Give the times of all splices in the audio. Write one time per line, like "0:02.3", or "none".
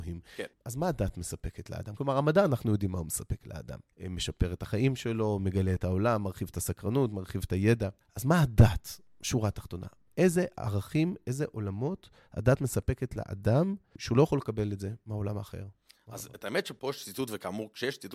none